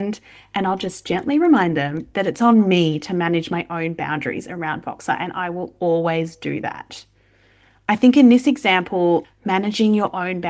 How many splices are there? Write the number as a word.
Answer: one